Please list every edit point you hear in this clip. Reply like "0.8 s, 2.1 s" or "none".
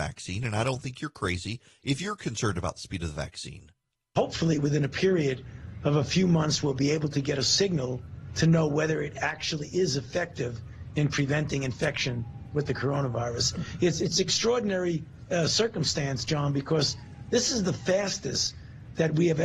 none